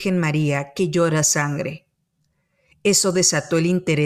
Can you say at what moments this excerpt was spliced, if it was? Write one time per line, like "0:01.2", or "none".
none